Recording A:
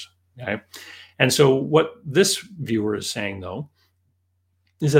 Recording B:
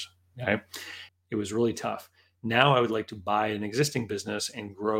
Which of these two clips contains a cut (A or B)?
B